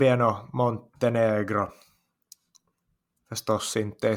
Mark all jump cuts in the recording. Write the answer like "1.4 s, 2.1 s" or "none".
3.1 s

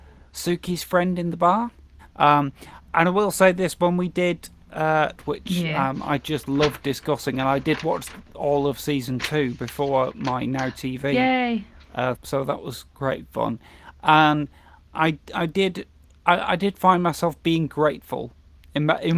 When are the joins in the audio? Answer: 2.0 s, 5.2 s, 12.2 s

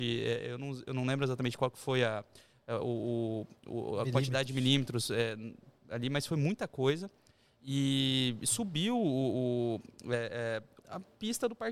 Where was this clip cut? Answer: 10.8 s

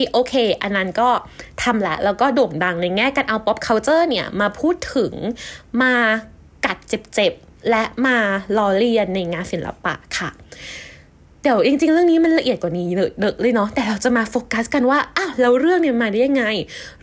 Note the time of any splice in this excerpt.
none

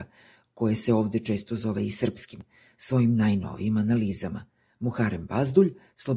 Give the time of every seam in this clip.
none

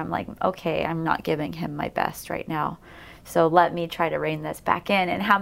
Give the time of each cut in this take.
1.0 s

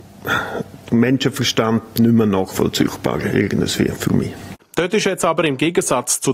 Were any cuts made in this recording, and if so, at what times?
4.6 s

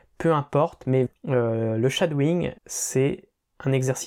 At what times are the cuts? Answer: 1.1 s, 2.6 s

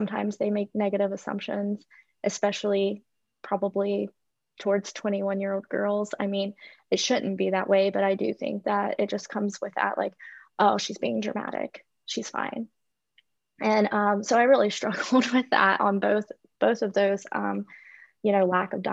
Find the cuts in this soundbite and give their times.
none

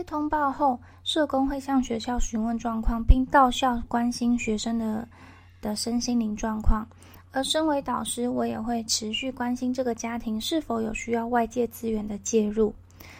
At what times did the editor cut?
none

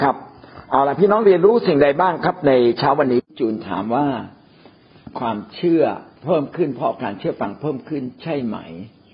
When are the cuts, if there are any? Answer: 6.2 s

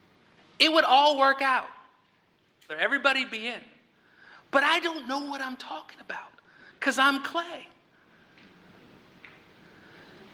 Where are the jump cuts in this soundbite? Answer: 2.7 s

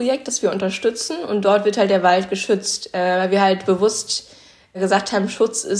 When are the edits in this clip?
none

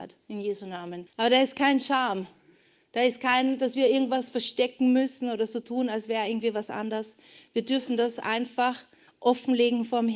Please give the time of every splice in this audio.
1.1 s

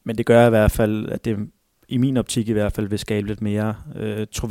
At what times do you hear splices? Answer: none

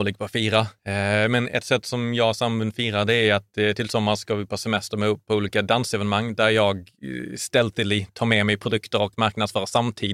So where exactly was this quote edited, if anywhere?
none

